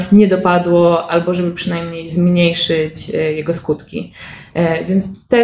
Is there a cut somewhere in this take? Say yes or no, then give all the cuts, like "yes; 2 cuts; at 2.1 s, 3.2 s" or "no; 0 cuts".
no; 0 cuts